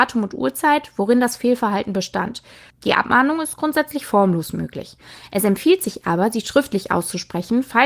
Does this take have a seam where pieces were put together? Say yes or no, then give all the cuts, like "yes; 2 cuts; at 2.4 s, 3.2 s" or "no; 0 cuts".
yes; 1 cut; at 2.7 s